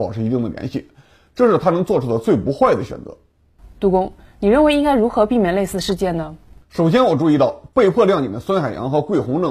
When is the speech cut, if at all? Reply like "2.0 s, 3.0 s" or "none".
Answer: 3.7 s